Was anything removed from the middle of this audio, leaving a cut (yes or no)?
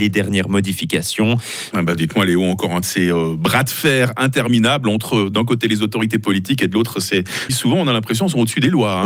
yes